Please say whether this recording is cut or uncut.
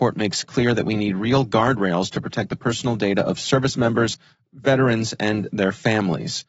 uncut